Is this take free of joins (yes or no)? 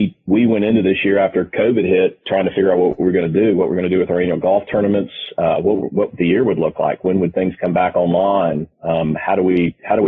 yes